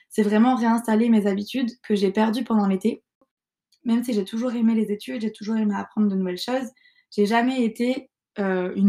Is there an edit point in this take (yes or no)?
no